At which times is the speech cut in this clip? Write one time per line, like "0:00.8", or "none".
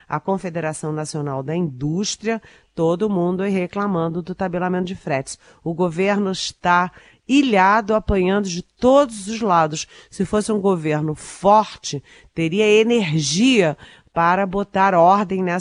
none